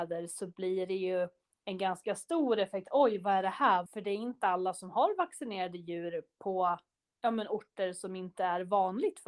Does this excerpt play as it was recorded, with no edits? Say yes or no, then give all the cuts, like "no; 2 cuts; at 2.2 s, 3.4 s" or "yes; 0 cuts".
no; 1 cut; at 3.9 s